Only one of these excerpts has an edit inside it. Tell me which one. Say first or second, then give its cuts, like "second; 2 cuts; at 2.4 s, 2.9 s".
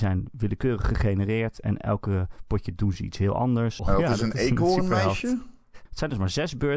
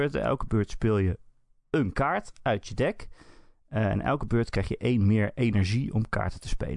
first; 2 cuts; at 3.8 s, 5.9 s